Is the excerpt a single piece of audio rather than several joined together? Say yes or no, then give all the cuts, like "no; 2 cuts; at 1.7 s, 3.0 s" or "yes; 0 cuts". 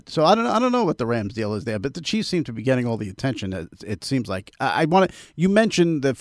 yes; 0 cuts